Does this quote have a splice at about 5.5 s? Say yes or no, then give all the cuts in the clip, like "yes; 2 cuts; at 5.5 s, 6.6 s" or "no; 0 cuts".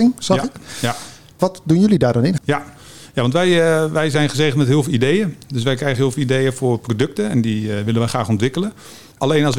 no; 1 cut; at 2.4 s